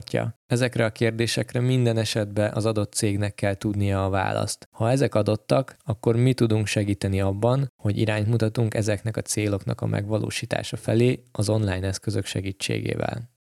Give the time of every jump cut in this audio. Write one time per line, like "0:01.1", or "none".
none